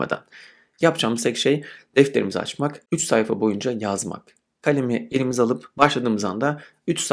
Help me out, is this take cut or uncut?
uncut